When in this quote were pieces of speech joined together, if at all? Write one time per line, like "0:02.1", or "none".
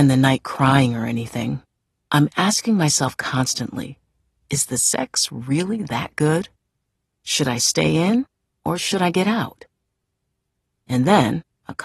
0:02.0